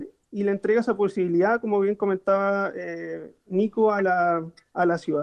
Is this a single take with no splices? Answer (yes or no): yes